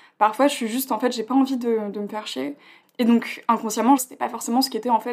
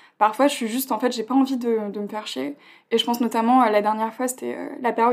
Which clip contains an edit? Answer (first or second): first